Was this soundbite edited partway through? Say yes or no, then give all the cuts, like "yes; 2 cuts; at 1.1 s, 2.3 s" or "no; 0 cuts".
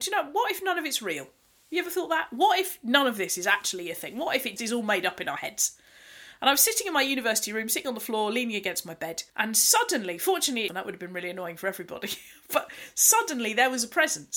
yes; 3 cuts; at 4.6 s, 9.3 s, 10.7 s